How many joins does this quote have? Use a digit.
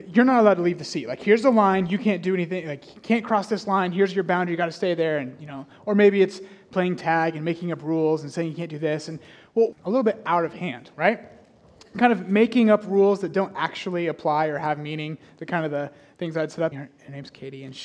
3